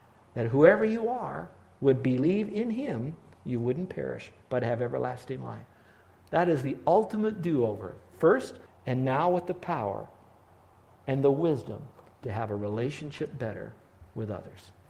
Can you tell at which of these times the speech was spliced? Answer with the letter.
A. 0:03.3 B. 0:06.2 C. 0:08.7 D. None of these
C